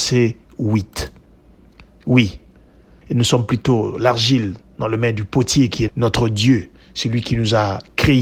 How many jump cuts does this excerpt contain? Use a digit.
2